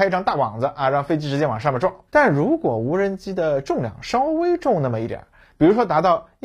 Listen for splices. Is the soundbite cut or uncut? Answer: cut